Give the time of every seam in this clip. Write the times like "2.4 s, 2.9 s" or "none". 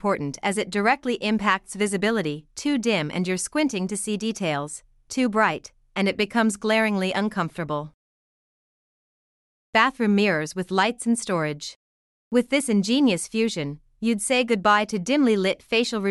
12.2 s